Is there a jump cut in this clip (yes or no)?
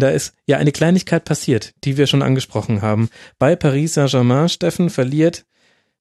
no